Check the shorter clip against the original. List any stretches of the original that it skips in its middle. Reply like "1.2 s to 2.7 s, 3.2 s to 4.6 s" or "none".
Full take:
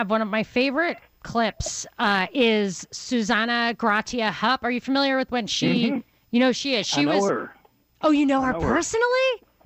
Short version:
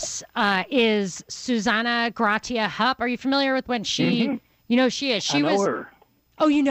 none